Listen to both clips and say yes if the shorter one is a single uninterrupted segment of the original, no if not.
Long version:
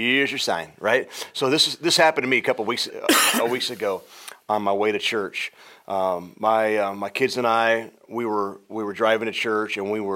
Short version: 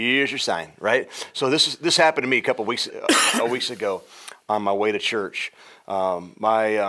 yes